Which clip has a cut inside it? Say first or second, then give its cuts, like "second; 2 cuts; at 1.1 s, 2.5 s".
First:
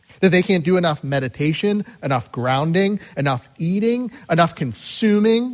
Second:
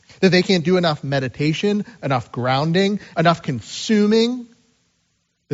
second; 1 cut; at 3.1 s